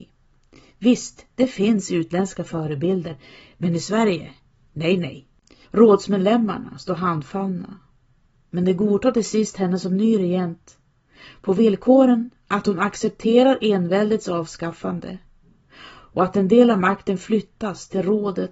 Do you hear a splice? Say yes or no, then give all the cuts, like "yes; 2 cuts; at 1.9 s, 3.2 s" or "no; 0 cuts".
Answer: yes; 1 cut; at 5.6 s